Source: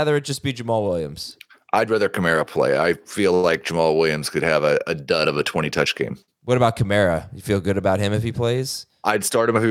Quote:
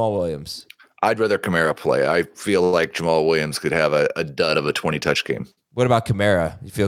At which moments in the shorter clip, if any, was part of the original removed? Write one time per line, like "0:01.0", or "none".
none